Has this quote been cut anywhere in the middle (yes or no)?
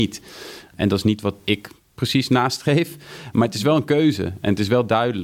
no